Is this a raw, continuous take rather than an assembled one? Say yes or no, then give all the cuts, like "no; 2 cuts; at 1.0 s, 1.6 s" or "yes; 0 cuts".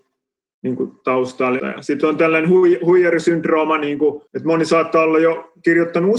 no; 2 cuts; at 1.6 s, 4.3 s